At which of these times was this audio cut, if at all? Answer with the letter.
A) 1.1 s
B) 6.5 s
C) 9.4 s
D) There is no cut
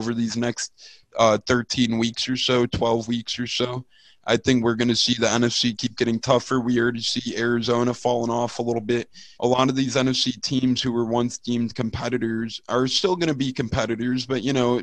C